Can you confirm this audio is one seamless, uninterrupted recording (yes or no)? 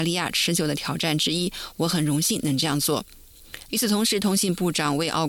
no